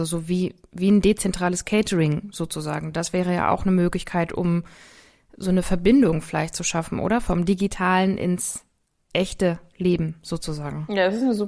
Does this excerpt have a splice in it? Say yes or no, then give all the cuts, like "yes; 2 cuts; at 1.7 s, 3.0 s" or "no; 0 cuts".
no; 0 cuts